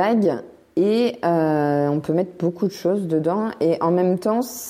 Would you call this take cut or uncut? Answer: uncut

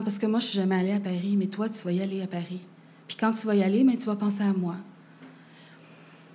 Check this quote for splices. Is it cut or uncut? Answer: uncut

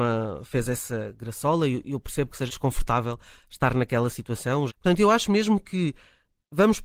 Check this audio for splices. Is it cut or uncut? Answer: cut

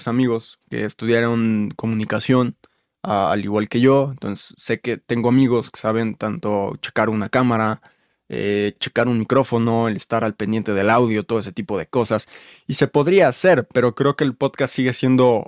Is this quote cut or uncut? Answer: uncut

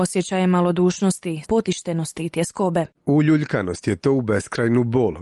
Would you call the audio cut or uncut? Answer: cut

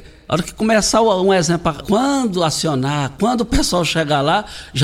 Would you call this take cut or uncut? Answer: cut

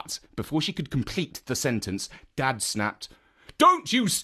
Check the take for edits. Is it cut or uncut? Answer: uncut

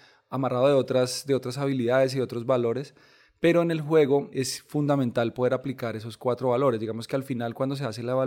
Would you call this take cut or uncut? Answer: cut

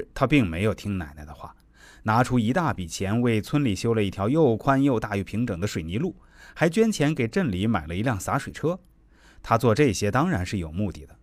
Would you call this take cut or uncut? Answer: uncut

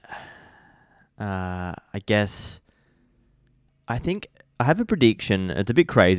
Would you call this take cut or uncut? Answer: uncut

